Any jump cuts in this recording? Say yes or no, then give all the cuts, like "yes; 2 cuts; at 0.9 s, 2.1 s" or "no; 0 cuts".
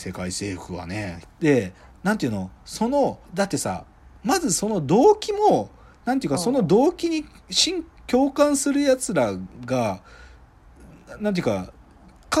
yes; 2 cuts; at 1.2 s, 3.2 s